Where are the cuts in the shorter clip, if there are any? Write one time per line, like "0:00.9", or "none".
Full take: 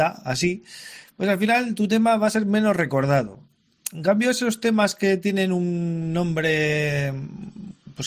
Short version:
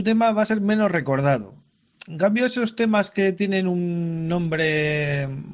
none